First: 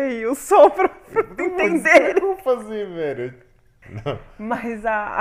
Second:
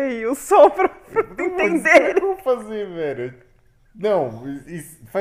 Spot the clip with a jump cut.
first; 1 cut; at 3.8 s

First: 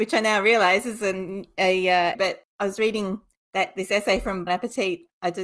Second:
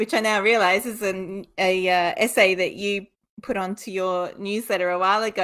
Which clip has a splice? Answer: first; 2 cuts; at 2.1 s, 4.5 s

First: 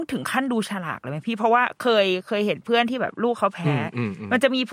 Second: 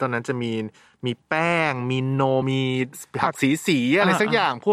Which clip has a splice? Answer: second; 1 cut; at 2.4 s

